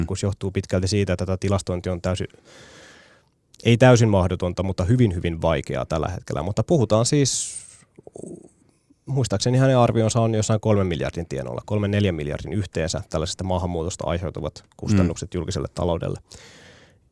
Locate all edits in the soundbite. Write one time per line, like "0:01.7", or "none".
none

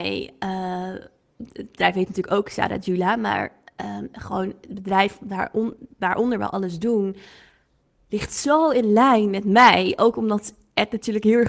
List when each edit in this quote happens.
none

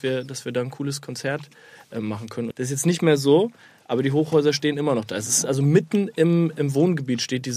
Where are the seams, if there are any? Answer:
0:02.5

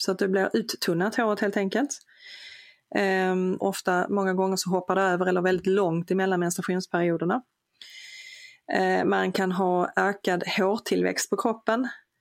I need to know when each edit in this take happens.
0:03.6

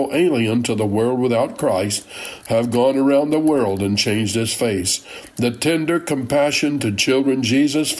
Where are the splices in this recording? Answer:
0:02.4

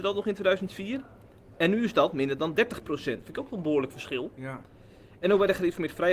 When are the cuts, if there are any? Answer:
none

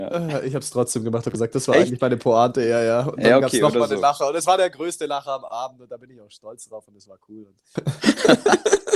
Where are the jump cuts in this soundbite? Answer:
0:07.8

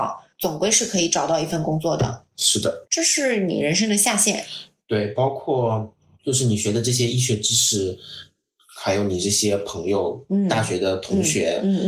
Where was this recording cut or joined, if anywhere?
0:02.8

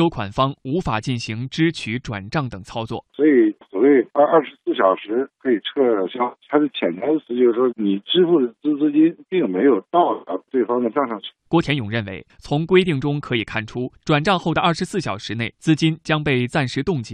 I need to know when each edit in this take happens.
0:03.1
0:07.7
0:11.4

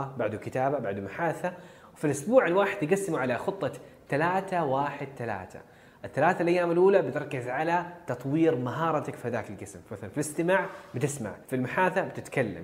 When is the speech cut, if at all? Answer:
0:11.5

